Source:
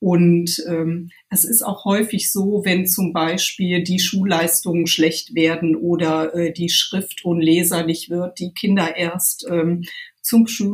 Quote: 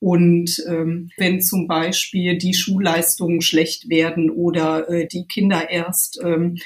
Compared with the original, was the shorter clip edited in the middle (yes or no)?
yes